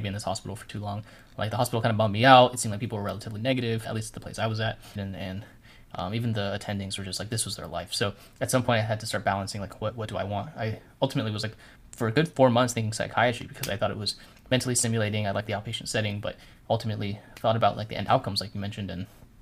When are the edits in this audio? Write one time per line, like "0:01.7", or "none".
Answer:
0:05.0